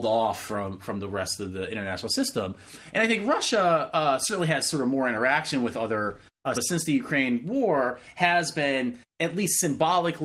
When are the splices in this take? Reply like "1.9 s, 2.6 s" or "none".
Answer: 6.5 s